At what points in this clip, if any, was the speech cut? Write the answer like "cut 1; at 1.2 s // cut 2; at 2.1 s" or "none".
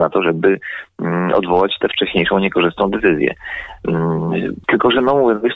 cut 1; at 4.6 s